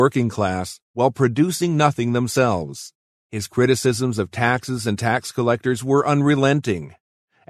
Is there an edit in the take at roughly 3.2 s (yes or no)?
yes